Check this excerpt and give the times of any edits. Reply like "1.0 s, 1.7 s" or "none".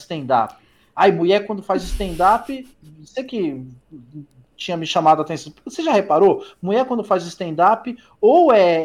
none